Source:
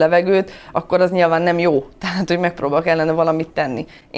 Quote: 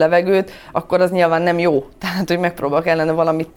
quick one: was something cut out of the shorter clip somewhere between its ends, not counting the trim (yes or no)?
no